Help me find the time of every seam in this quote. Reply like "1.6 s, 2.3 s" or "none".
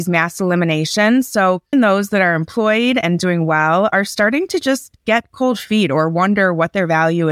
1.7 s